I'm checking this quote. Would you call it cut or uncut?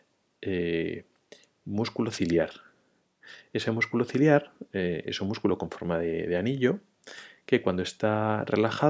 uncut